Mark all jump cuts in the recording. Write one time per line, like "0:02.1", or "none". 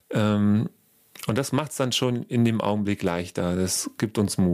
none